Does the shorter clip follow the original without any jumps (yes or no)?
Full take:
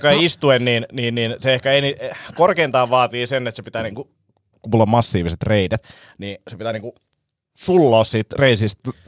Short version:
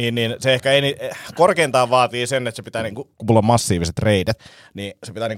no